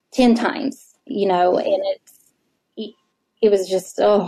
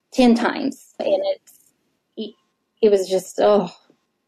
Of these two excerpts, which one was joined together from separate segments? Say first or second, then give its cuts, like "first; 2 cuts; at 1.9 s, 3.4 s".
second; 1 cut; at 1.0 s